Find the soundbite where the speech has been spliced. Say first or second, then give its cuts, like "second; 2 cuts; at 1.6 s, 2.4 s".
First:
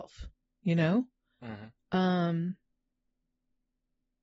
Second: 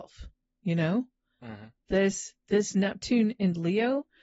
first; 1 cut; at 1.8 s